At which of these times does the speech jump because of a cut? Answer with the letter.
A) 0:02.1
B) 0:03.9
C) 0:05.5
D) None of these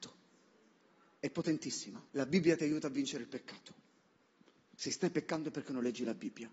A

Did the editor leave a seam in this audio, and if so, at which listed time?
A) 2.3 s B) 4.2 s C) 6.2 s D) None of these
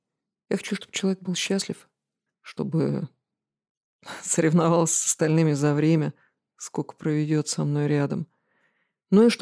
A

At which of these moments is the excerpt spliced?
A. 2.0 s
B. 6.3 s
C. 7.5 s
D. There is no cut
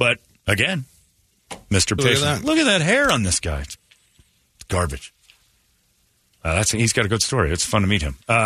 A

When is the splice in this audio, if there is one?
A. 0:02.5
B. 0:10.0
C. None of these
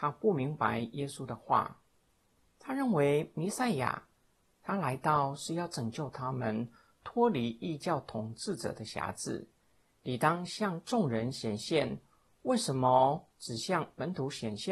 C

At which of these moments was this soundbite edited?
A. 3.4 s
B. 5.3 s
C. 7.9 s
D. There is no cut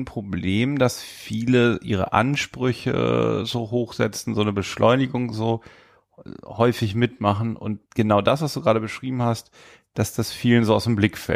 C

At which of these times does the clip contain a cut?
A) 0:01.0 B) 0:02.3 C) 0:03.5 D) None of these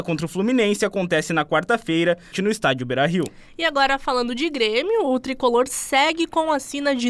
B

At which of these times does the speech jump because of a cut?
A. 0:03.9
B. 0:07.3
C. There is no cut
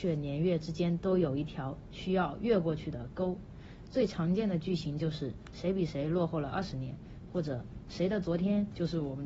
C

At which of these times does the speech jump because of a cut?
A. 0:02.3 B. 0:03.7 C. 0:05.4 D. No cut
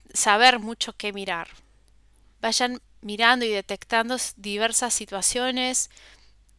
A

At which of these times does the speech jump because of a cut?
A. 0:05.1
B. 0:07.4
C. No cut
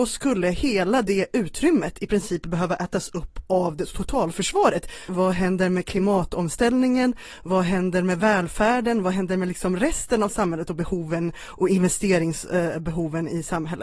A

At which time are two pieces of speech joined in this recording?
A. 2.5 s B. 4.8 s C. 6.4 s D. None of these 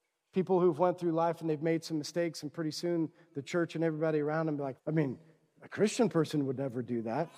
B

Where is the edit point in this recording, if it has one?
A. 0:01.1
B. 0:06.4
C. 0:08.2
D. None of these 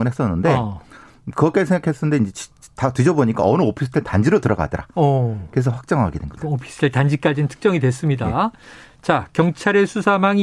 B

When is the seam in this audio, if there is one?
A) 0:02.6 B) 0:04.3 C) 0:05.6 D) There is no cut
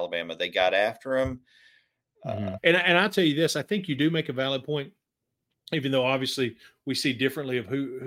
A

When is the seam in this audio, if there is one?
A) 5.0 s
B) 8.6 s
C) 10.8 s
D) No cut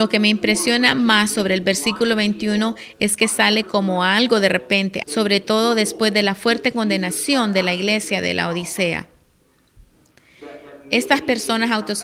A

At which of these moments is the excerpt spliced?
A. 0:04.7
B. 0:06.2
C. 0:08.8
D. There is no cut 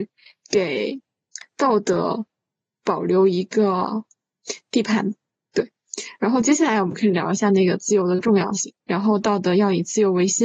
C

